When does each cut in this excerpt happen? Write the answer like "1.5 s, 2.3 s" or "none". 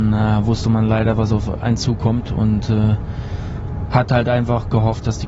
none